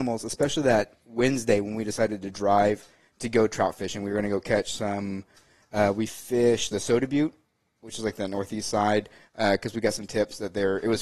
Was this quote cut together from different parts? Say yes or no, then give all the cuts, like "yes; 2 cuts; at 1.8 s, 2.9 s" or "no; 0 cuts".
no; 0 cuts